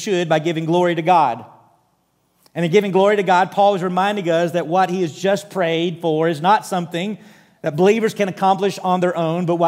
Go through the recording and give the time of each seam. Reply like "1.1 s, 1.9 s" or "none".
none